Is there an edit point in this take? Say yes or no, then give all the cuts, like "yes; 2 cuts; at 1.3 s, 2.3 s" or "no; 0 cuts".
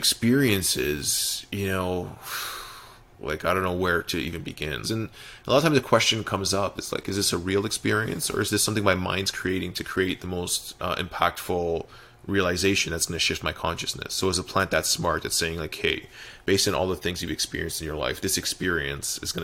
yes; 1 cut; at 4.8 s